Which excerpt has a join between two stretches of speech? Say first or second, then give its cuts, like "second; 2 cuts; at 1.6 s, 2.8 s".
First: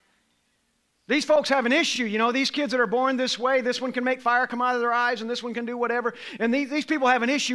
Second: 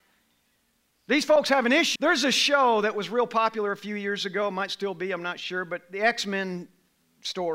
second; 1 cut; at 2.0 s